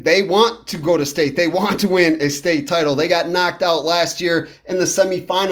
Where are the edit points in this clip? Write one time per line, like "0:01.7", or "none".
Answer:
none